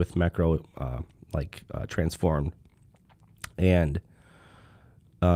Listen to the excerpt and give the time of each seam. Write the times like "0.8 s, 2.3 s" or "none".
none